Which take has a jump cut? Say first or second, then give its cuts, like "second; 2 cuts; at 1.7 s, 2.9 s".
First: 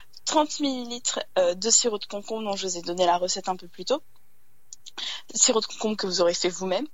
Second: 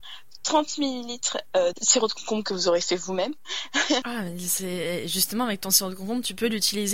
second; 2 cuts; at 1.7 s, 4.0 s